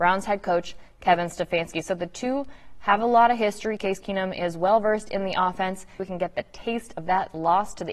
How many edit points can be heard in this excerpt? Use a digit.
1